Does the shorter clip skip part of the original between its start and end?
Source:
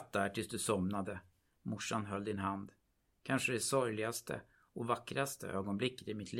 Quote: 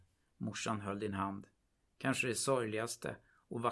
no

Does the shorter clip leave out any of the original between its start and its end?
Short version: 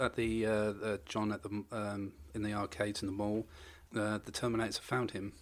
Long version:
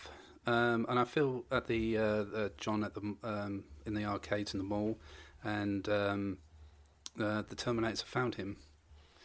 yes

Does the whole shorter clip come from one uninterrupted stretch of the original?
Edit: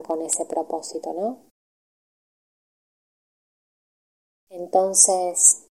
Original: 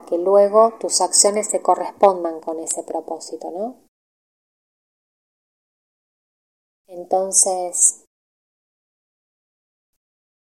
yes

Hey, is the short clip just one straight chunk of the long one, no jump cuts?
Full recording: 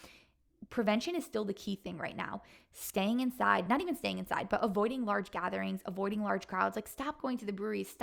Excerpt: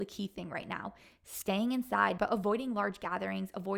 no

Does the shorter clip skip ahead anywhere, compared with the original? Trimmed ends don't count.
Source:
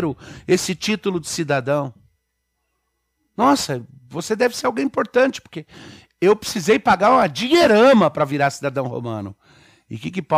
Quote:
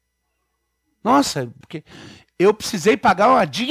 yes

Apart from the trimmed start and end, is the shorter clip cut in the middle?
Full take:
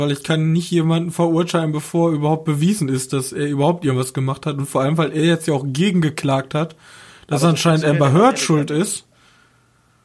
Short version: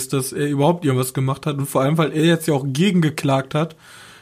no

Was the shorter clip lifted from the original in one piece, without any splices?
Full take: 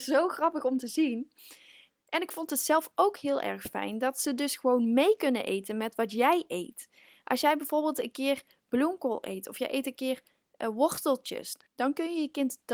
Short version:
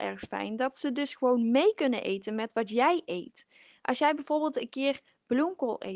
yes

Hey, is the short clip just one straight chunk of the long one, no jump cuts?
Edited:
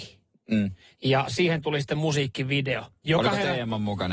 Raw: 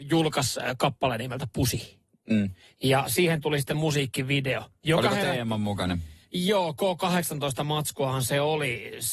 yes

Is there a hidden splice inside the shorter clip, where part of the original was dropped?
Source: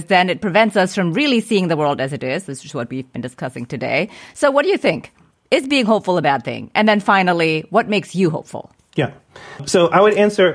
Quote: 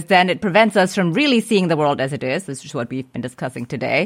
no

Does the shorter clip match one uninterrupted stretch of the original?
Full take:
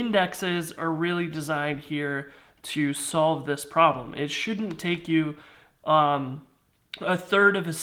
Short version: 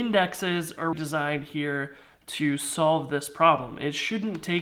no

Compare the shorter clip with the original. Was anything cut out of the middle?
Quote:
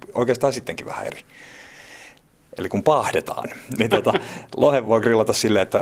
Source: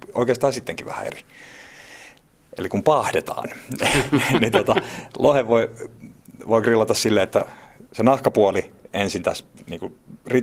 yes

